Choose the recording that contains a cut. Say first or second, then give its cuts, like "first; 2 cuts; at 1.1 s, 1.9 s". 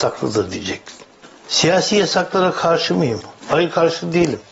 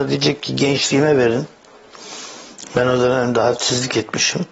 first; 1 cut; at 3.4 s